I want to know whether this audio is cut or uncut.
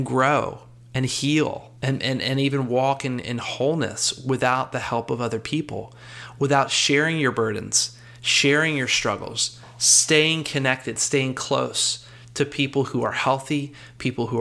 cut